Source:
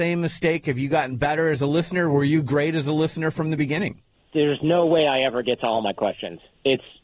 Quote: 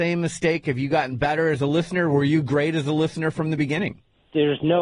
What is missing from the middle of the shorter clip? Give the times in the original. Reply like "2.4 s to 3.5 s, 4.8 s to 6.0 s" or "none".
none